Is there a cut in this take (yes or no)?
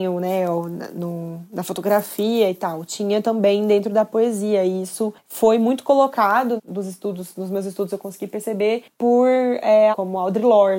yes